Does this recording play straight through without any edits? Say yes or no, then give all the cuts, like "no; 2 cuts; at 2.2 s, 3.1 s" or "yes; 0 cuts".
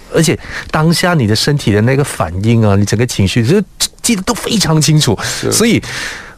yes; 0 cuts